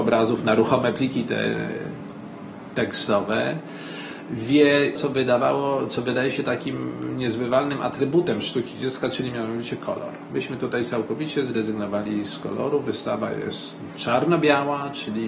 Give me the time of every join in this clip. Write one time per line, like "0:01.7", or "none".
0:05.0